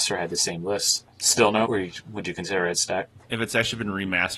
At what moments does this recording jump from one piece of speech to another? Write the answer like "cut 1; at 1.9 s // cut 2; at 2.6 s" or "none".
cut 1; at 1.6 s